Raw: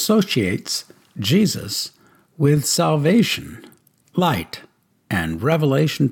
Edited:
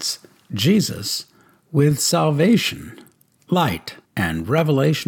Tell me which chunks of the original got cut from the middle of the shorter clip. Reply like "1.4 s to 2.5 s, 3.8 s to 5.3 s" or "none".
4.7 s to 5.0 s